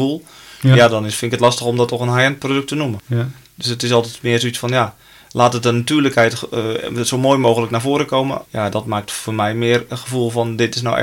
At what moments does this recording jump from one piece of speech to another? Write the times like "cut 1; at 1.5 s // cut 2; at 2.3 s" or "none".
cut 1; at 3.0 s // cut 2; at 8.4 s